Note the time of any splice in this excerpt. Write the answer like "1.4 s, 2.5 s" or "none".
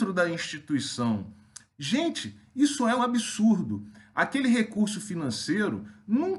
1.7 s, 3.0 s

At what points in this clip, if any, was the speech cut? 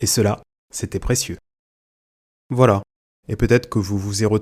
3.2 s

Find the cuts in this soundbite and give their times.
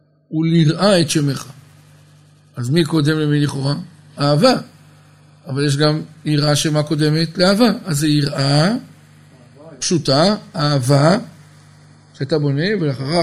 none

